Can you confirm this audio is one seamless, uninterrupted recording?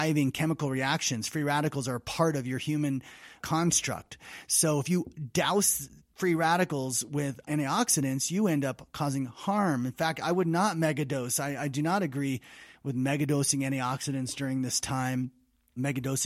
yes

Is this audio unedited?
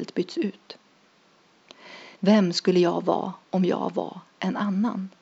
no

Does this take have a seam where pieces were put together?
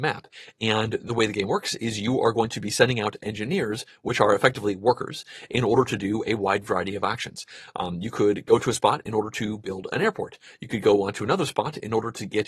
no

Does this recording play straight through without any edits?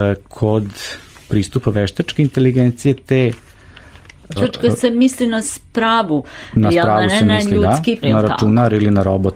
no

